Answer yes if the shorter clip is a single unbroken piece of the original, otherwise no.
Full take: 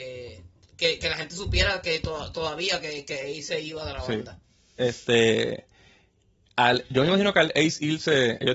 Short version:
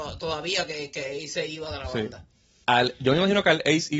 no